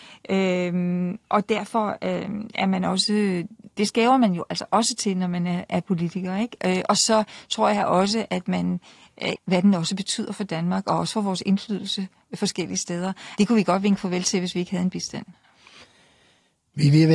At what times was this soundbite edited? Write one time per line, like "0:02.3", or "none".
0:09.4
0:13.4